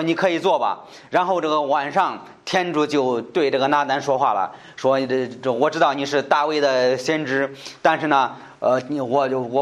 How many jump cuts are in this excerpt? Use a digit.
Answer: 0